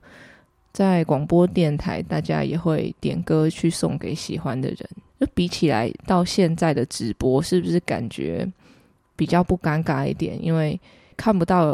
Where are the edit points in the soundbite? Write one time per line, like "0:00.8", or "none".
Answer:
none